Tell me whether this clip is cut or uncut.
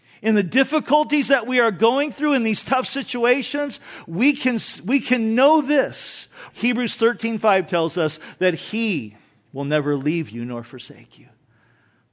cut